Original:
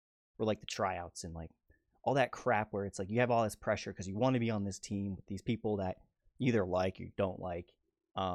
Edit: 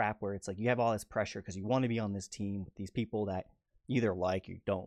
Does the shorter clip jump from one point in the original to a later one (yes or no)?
no